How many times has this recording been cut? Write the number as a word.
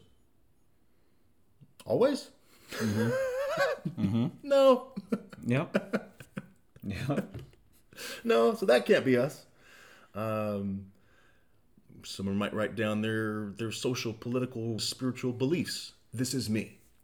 one